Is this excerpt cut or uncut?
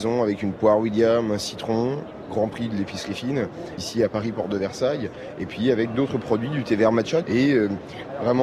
cut